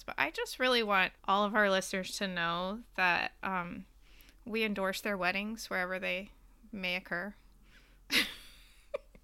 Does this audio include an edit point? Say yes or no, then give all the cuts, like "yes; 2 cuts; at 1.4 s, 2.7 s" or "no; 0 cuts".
yes; 1 cut; at 1.2 s